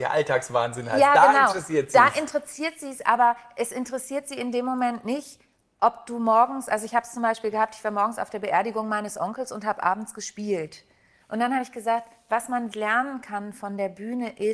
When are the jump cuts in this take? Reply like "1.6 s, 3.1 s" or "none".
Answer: 11.2 s, 12.7 s